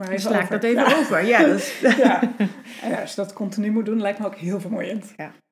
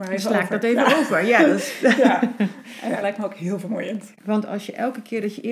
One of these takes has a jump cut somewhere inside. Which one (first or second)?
second